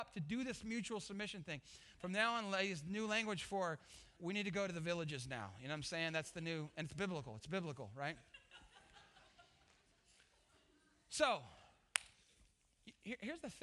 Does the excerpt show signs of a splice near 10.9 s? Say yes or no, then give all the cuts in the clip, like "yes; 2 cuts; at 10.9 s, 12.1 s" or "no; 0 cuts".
no; 2 cuts; at 1.9 s, 4.2 s